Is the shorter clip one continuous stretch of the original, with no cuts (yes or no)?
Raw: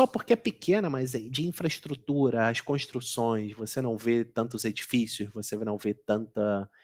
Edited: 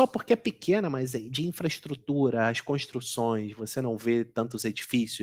yes